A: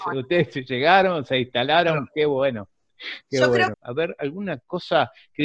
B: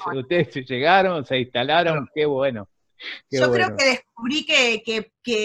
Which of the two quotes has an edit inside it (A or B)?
A